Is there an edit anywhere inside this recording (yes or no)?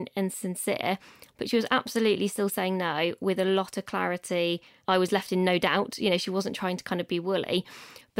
no